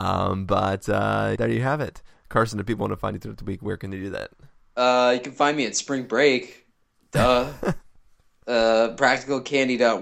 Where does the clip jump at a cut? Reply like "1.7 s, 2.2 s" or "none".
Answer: 1.4 s